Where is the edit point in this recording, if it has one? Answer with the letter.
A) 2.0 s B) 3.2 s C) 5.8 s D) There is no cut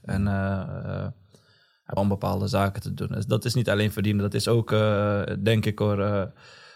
A